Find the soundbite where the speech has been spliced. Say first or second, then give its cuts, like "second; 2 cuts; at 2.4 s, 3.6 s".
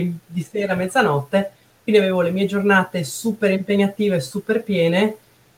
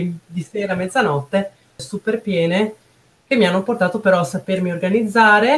second; 1 cut; at 1.8 s